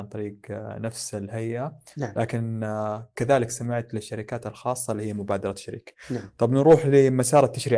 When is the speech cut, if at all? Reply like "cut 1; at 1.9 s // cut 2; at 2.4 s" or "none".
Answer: none